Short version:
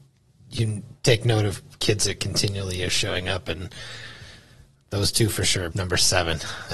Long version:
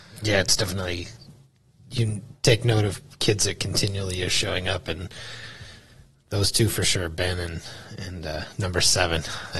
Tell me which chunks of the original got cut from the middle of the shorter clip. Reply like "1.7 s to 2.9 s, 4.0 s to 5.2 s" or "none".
7.1 s to 8.6 s